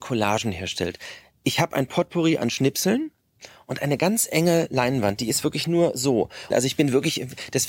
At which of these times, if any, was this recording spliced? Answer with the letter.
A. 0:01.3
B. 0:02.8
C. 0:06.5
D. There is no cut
C